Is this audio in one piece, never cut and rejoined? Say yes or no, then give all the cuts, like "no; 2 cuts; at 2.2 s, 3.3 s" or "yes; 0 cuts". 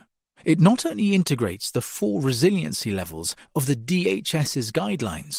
yes; 0 cuts